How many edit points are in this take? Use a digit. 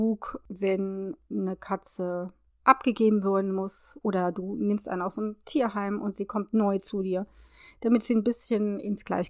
0